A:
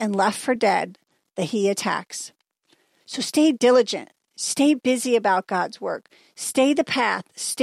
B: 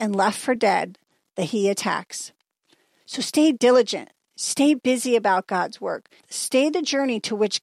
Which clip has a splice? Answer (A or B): B